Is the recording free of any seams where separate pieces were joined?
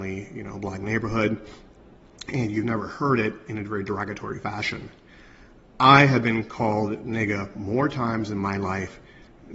yes; 0 cuts

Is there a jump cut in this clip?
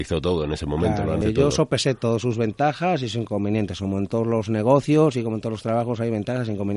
yes; 1 cut; at 1.2 s

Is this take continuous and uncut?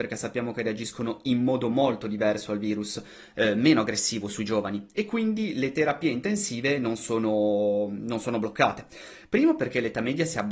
no; 1 cut; at 9.2 s

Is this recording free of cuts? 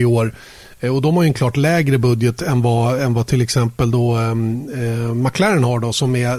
yes; 0 cuts

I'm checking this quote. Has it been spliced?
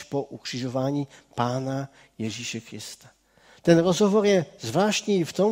no; 0 cuts

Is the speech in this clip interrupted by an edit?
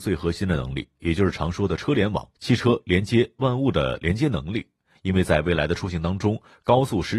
yes; 1 cut; at 2.4 s

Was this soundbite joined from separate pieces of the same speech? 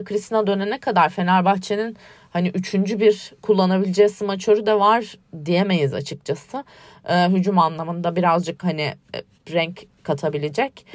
no; 0 cuts

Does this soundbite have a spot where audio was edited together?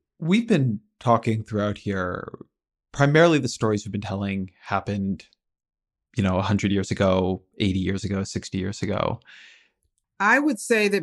yes; 1 cut; at 10.0 s

